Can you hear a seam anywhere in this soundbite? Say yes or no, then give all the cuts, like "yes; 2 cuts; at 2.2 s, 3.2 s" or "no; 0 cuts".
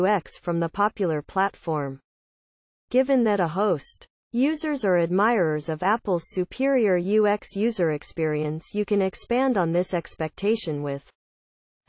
no; 0 cuts